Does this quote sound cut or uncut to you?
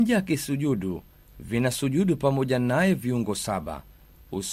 uncut